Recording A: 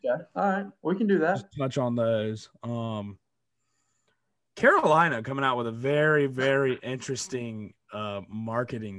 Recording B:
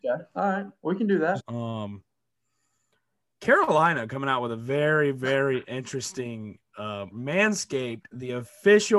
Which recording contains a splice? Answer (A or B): B